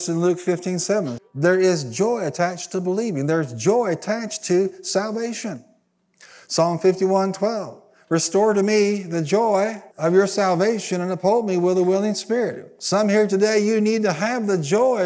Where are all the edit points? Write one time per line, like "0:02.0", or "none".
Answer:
0:01.2
0:09.9